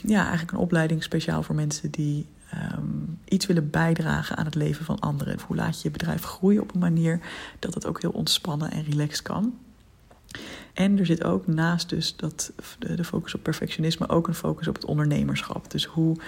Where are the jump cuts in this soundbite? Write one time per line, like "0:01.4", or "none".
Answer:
0:05.4
0:10.7